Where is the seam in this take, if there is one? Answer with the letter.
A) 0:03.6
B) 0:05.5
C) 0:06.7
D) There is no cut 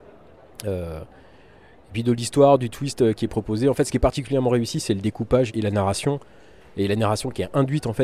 B